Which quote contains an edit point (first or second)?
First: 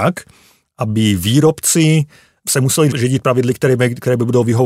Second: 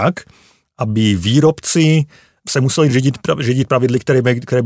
first